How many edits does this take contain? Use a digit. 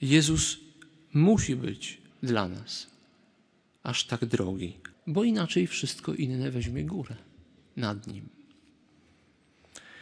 2